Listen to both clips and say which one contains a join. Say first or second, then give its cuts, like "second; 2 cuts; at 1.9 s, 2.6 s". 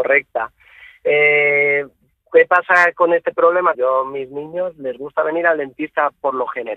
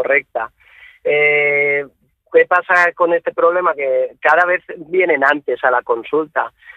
first; 1 cut; at 3.7 s